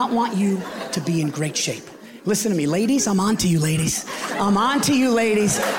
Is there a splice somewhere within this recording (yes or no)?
no